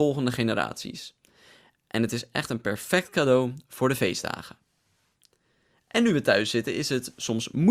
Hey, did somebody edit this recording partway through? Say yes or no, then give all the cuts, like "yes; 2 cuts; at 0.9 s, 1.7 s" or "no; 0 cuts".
no; 0 cuts